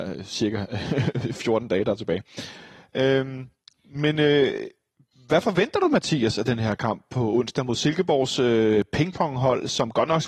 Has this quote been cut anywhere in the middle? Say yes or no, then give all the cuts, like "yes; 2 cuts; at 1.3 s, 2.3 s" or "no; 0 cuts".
no; 0 cuts